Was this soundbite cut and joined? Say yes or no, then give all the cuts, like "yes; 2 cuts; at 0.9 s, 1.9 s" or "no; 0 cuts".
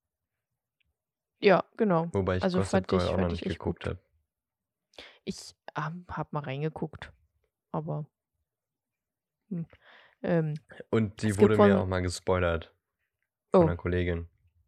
no; 0 cuts